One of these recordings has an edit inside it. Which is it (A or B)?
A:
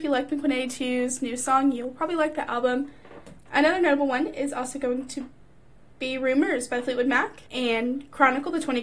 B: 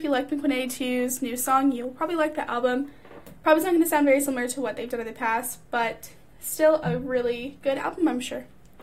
A